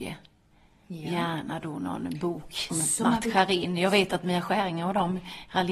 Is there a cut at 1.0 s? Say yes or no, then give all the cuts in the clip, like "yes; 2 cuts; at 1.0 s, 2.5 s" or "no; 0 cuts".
no; 1 cut; at 2.7 s